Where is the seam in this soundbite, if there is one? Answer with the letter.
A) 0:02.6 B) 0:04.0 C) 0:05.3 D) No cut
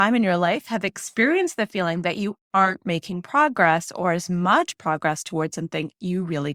D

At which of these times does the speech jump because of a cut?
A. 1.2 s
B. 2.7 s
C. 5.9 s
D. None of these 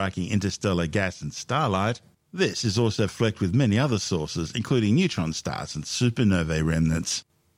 D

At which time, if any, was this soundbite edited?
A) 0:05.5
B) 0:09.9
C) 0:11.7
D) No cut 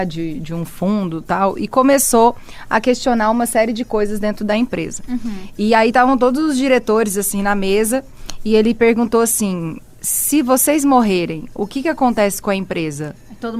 D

